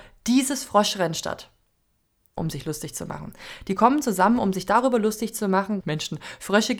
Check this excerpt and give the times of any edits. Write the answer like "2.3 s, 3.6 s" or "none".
2.4 s, 5.8 s